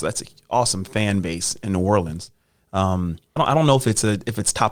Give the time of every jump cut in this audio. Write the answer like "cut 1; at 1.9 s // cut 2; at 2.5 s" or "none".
cut 1; at 3.4 s